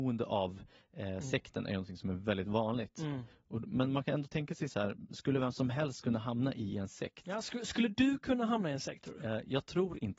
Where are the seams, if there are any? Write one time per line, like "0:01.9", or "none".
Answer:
none